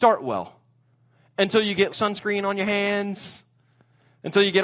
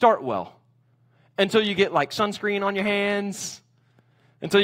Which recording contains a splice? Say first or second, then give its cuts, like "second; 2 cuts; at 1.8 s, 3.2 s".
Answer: first; 1 cut; at 1.9 s